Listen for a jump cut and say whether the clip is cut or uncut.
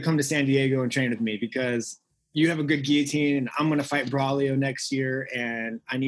uncut